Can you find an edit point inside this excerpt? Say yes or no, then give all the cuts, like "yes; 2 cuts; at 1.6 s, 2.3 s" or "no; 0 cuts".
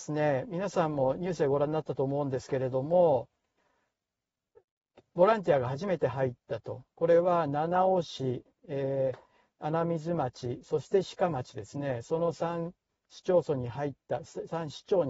no; 0 cuts